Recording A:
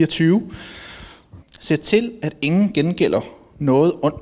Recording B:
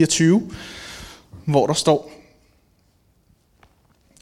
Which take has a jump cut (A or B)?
A